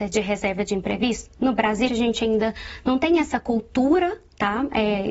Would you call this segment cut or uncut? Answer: cut